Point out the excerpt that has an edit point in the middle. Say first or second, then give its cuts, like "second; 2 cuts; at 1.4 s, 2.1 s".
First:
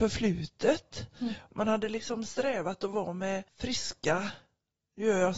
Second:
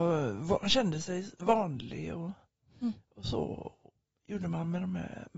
first; 2 cuts; at 1.5 s, 3.5 s